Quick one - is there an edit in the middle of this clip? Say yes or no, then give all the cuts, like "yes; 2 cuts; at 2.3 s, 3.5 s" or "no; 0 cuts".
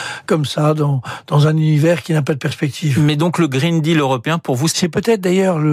yes; 1 cut; at 4.7 s